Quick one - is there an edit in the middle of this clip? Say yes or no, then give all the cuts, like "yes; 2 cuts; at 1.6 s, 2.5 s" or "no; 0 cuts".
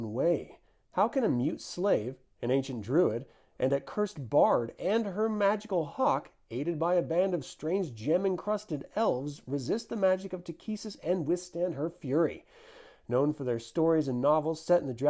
no; 0 cuts